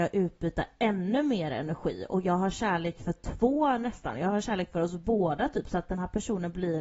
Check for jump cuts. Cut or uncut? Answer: uncut